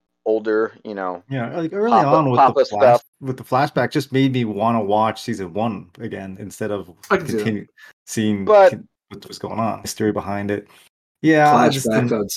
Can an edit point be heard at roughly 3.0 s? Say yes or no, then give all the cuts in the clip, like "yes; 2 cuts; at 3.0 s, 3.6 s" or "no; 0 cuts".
yes; 2 cuts; at 3.0 s, 9.8 s